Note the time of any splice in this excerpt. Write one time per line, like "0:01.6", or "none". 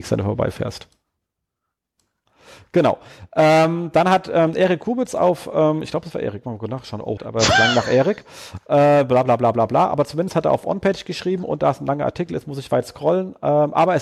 0:07.2